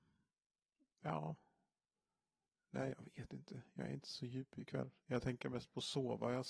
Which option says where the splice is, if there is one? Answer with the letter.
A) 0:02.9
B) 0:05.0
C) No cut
A